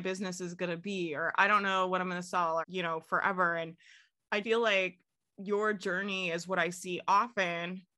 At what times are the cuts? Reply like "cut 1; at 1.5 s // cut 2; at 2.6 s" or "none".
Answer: cut 1; at 2.6 s // cut 2; at 4.4 s